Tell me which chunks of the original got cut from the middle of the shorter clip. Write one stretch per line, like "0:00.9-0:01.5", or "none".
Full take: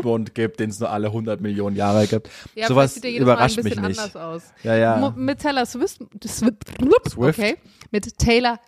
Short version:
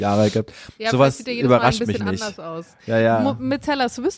none

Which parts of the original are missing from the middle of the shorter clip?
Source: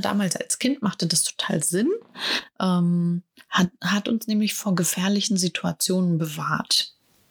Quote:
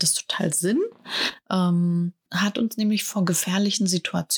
0:03.4-0:03.8

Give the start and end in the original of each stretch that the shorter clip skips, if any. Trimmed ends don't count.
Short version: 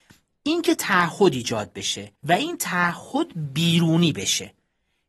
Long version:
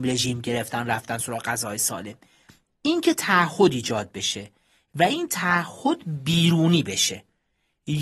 0:04.5-0:04.9

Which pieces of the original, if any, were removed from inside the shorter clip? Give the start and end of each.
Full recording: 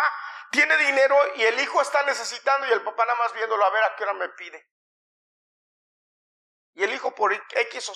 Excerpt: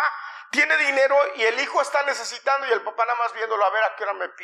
none

